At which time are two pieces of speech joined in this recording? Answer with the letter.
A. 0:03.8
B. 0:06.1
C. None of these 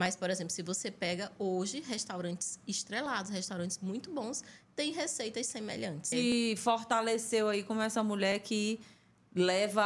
B